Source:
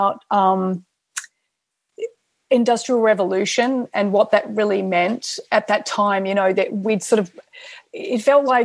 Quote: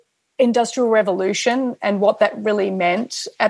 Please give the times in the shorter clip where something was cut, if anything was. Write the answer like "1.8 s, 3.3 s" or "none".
none

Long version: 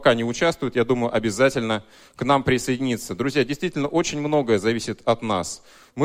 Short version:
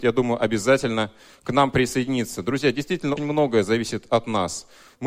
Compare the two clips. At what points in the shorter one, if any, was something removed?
3.2 s

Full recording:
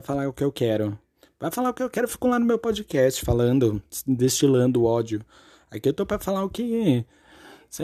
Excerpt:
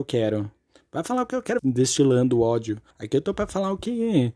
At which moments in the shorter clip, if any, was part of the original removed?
1.6 s, 2.9 s

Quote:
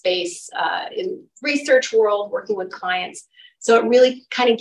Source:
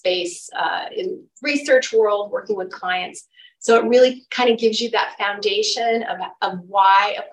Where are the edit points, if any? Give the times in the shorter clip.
none

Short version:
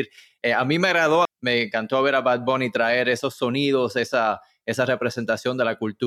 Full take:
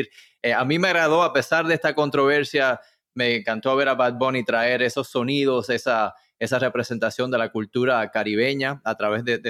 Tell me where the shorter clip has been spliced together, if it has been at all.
1.3 s

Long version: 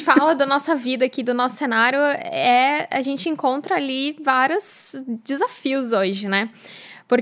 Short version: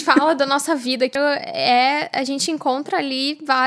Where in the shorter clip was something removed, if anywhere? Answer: 1.2 s

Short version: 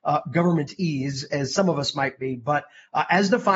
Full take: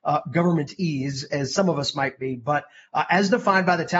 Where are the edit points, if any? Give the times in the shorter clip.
none

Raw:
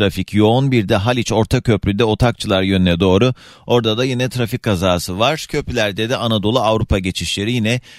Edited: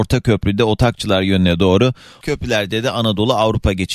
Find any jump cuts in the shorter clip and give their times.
2.2 s

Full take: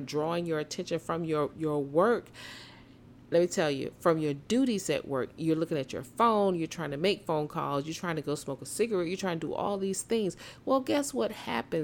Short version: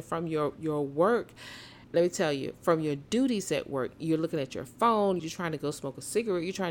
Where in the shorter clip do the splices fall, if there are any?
1.8 s, 5.2 s

